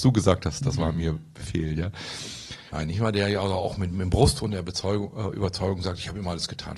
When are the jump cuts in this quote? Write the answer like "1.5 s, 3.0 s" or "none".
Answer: 2.7 s